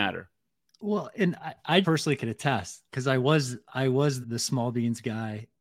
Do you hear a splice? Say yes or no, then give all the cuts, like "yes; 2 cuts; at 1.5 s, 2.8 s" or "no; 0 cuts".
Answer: yes; 2 cuts; at 1.8 s, 4.2 s